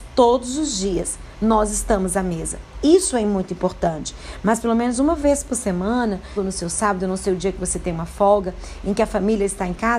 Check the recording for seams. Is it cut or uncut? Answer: cut